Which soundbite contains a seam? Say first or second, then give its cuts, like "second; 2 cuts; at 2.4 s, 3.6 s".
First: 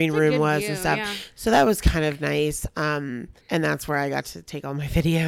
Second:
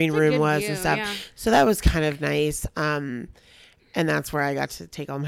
first; 1 cut; at 3.4 s